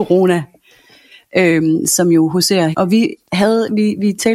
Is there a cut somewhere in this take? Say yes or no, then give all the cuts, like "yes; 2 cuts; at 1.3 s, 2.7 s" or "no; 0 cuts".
yes; 1 cut; at 2.7 s